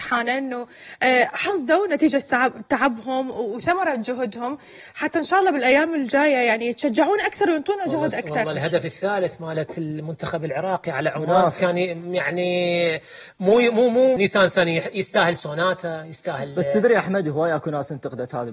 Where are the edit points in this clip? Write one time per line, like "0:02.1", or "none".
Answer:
0:14.2